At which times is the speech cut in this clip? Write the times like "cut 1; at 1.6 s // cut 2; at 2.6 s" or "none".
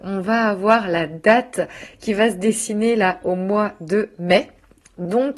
none